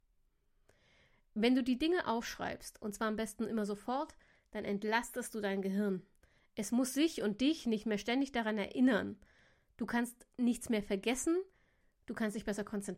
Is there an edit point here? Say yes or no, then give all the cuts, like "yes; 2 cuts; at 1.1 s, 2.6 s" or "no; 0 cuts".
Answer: no; 0 cuts